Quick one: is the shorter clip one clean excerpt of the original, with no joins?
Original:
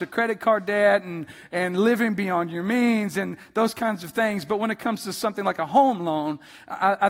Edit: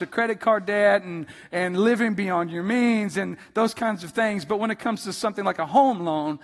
yes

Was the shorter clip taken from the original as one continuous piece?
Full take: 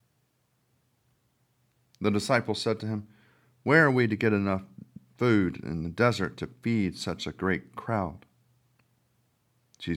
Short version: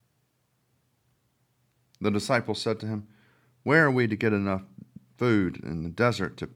yes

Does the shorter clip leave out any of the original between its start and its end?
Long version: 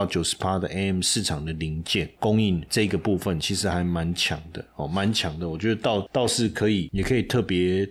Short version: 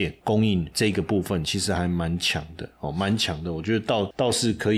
no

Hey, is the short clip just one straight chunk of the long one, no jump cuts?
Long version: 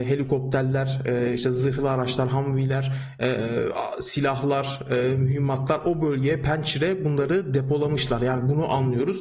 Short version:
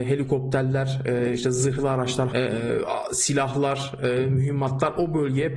no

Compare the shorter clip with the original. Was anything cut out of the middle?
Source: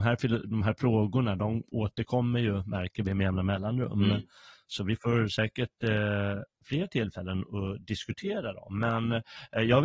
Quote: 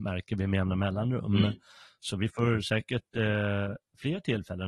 no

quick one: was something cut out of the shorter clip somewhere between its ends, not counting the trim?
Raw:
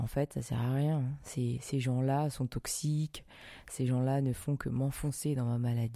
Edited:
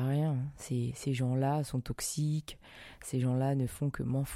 no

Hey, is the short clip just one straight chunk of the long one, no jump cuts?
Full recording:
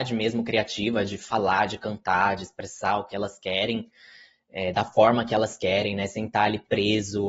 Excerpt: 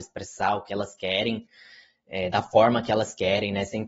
yes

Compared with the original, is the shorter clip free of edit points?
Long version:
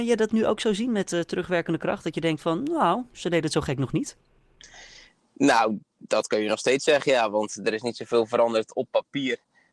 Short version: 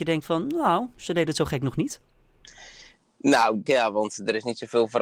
no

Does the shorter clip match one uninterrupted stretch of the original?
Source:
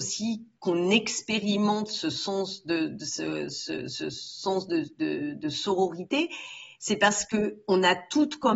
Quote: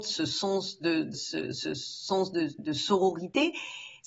no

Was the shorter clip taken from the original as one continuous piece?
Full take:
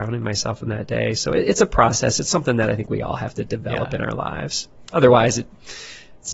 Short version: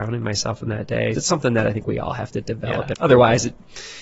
no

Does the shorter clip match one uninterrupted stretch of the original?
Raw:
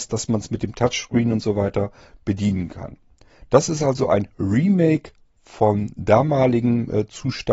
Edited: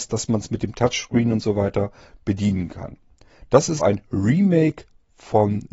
no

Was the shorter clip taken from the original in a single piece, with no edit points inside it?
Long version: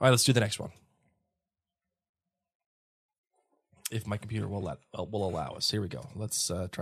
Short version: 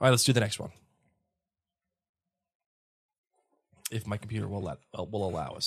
yes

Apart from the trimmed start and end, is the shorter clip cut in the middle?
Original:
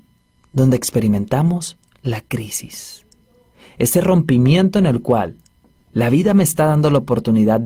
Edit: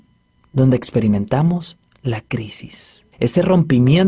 yes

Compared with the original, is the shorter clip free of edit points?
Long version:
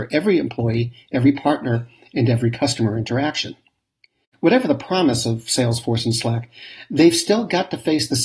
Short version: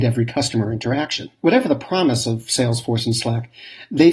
no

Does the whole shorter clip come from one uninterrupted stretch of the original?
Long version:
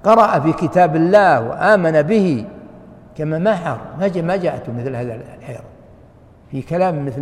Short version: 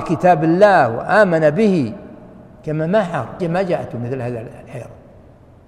no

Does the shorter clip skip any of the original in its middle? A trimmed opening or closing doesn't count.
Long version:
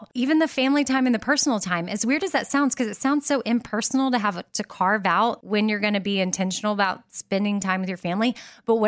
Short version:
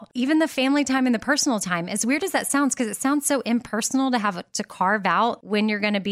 no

